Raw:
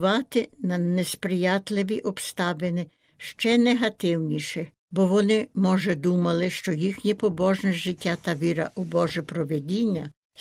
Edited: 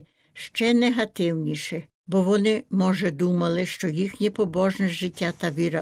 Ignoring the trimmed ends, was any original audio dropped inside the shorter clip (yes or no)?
no